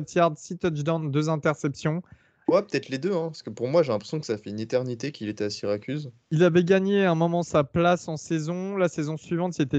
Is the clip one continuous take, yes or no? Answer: no